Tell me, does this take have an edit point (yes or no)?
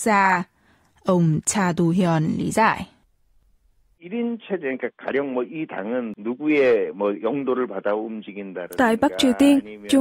no